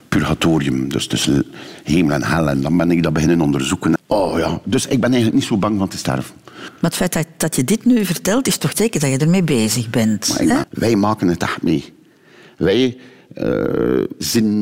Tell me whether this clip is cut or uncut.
cut